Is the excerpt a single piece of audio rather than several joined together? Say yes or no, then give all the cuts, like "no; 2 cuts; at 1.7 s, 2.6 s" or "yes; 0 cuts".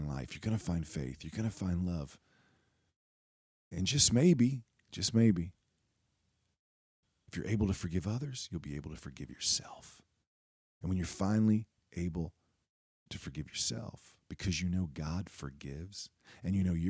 yes; 0 cuts